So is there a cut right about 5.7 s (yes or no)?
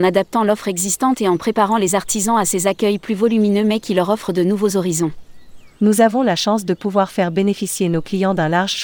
yes